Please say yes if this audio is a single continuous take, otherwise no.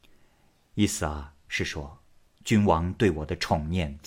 no